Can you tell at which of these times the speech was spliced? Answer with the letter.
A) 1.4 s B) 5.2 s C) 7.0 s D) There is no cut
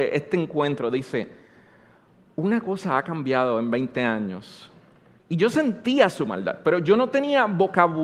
B